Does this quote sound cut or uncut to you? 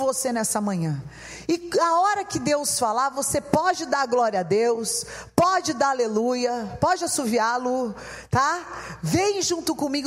uncut